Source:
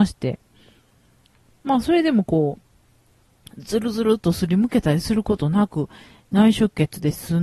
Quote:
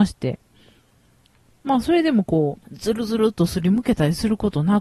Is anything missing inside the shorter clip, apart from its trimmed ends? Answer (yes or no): yes